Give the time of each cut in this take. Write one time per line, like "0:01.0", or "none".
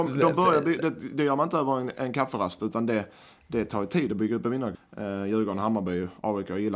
0:04.7